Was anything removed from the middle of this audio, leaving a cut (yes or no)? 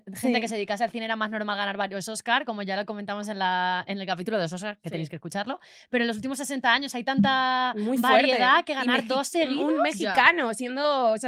no